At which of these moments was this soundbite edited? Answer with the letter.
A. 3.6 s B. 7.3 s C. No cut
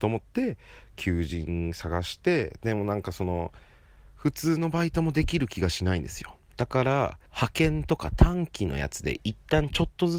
B